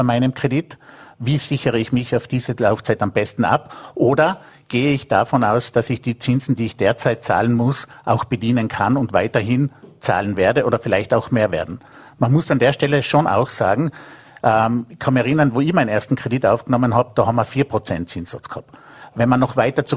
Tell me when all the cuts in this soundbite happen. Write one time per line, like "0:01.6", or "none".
none